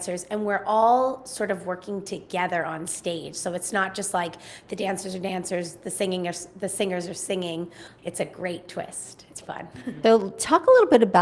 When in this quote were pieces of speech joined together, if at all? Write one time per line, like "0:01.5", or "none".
0:08.0
0:09.4